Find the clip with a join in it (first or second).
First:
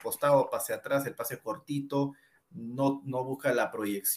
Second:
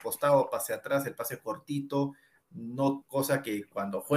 second